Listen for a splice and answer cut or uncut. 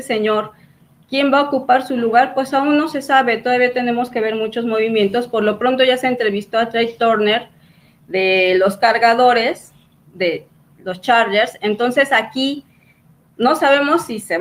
uncut